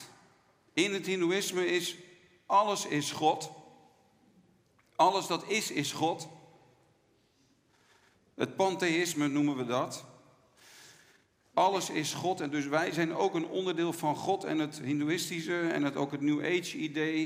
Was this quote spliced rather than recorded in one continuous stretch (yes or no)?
yes